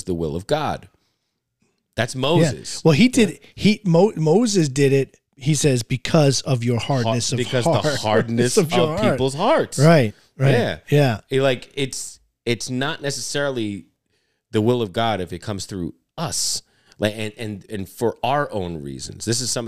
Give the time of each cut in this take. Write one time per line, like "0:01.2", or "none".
none